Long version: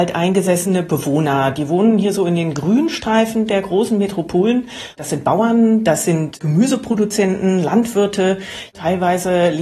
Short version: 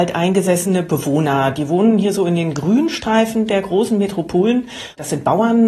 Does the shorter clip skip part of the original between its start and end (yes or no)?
no